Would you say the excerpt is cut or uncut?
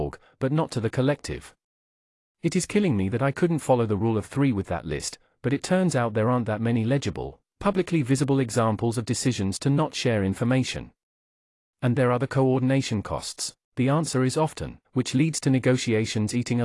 cut